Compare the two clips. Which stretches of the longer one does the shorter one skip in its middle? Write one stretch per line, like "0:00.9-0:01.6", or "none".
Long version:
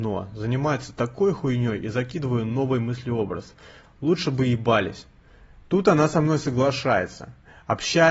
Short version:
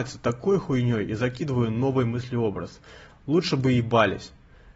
none